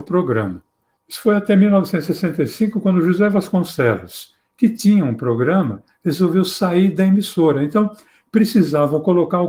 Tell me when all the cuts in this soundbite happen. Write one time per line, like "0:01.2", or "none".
0:00.9

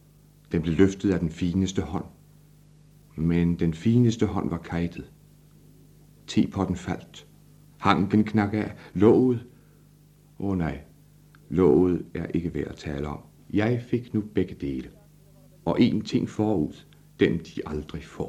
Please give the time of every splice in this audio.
0:07.7
0:13.4

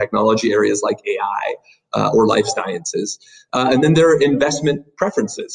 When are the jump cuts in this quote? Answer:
none

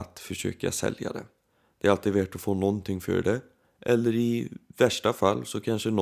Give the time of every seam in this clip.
none

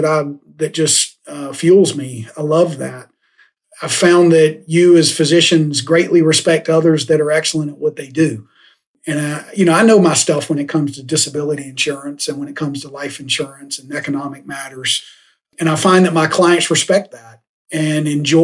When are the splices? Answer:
none

